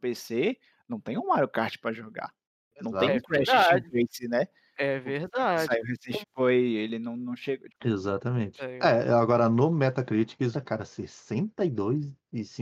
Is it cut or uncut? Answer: cut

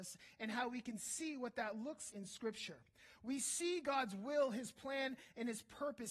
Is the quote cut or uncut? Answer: cut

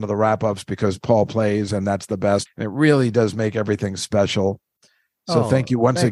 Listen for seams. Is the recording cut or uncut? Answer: cut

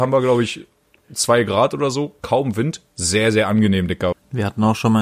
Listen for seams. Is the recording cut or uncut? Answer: cut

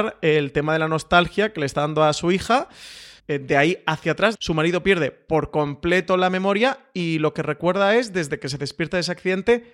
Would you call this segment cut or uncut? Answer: cut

